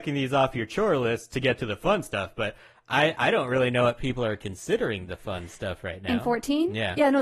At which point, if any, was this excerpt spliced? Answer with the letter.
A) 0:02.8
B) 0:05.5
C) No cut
C